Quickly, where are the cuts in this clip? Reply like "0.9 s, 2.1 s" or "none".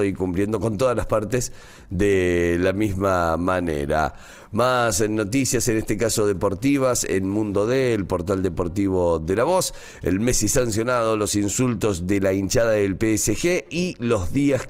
none